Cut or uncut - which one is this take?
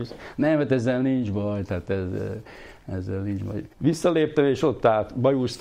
cut